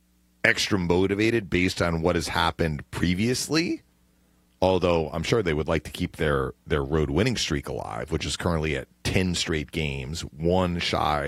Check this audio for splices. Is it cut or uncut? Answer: uncut